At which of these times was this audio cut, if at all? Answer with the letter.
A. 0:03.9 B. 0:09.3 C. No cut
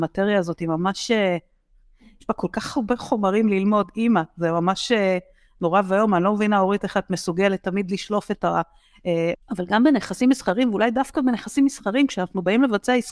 B